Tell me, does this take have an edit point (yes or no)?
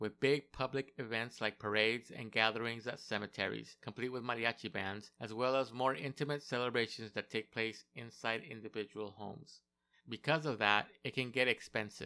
no